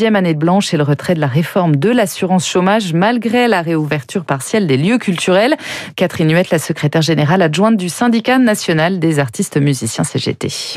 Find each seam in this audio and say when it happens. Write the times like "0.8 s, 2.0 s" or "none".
none